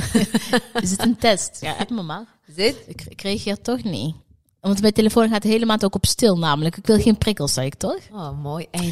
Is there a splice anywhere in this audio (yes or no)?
no